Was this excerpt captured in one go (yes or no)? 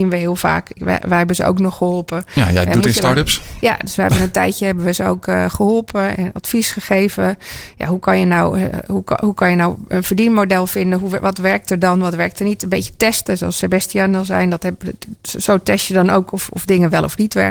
yes